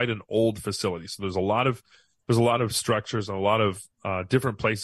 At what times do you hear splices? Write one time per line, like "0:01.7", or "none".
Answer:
none